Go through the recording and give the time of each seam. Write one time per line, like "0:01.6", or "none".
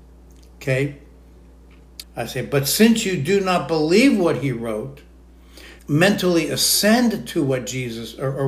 0:02.0
0:05.8